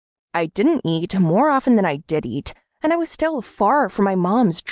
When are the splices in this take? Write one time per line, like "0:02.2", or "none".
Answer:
none

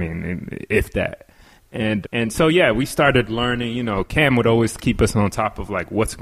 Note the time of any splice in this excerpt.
0:02.0

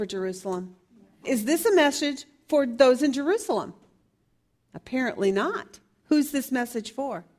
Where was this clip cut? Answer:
0:01.2

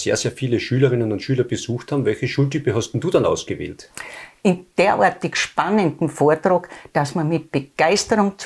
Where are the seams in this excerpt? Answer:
0:04.4

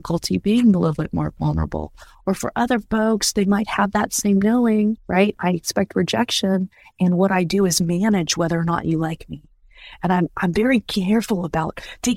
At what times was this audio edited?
none

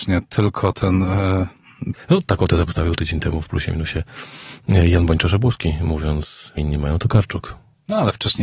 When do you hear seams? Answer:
0:01.9
0:06.6

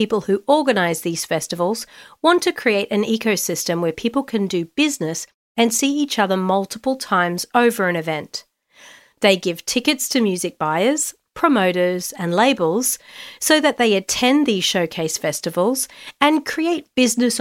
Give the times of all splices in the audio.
0:11.3

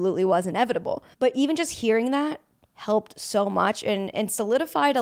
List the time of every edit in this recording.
0:01.1

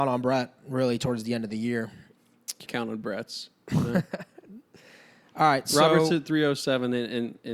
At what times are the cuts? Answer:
0:02.7

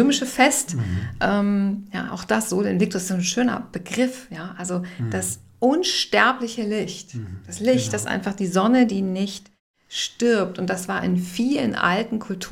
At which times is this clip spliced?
none

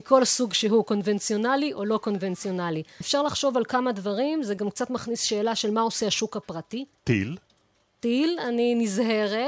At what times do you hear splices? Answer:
0:03.0
0:06.9

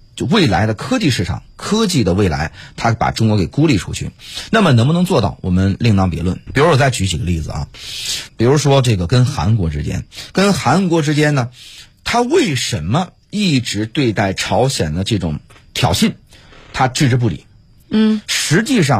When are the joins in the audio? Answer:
0:06.5
0:08.3

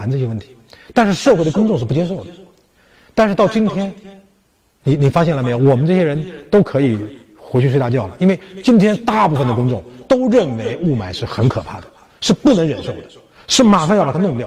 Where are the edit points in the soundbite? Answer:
none

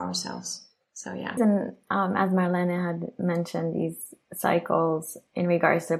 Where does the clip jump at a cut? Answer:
0:01.4

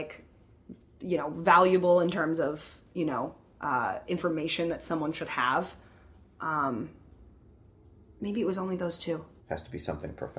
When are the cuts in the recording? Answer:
0:09.4

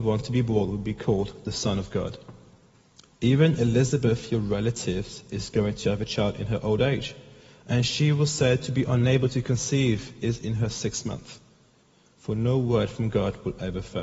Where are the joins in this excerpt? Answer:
none

